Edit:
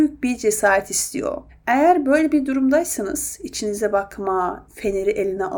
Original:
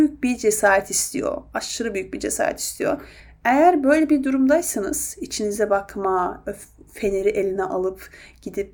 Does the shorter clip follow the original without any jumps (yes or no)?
no